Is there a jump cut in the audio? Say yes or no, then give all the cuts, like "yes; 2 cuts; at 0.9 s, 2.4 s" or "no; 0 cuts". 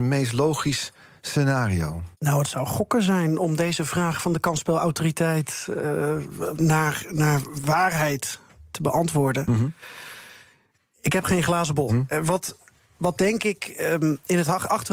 yes; 2 cuts; at 2.1 s, 11.9 s